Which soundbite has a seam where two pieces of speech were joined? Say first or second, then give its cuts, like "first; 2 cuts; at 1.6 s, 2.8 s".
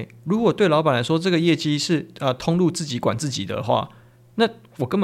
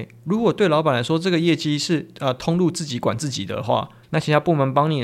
second; 1 cut; at 4.0 s